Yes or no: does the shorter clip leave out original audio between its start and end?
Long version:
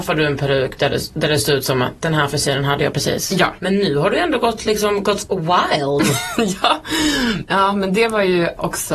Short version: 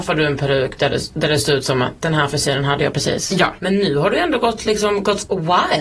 no